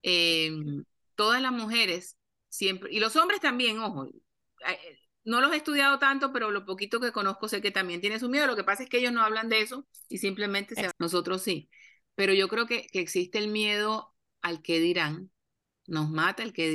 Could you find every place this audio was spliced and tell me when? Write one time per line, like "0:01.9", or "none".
0:10.9